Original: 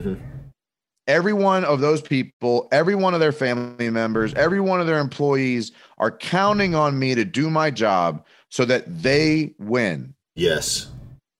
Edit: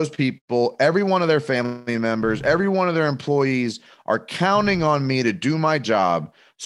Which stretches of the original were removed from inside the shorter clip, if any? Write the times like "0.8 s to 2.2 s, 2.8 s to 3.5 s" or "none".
none